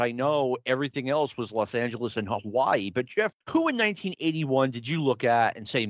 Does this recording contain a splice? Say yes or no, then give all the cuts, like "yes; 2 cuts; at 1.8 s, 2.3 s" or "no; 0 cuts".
yes; 1 cut; at 3.4 s